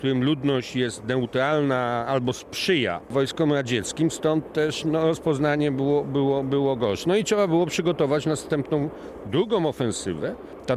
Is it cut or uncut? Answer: uncut